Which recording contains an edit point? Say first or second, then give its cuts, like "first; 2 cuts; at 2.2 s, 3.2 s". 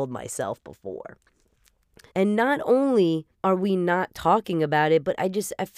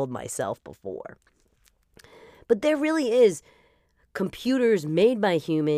first; 2 cuts; at 2.1 s, 3.3 s